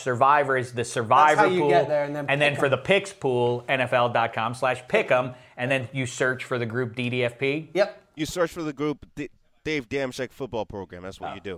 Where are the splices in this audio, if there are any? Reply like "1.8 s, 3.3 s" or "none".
none